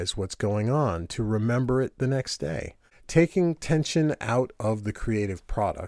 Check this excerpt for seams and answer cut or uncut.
uncut